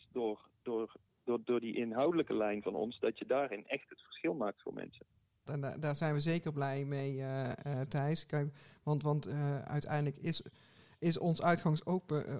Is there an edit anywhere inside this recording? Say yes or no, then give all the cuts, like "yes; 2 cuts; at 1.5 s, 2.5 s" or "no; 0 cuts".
yes; 2 cuts; at 1.1 s, 5.5 s